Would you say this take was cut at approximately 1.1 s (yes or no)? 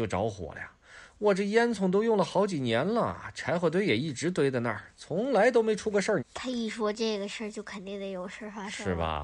no